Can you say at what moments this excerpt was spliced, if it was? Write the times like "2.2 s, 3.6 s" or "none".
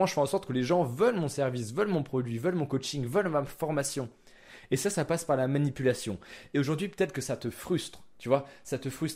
none